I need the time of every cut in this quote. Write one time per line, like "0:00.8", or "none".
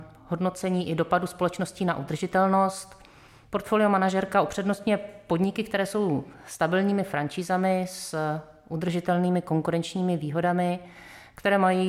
none